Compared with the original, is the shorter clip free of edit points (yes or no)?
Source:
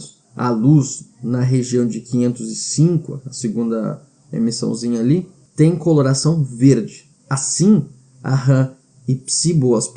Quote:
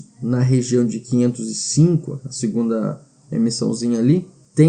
yes